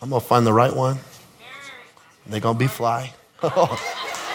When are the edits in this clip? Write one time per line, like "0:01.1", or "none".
0:03.4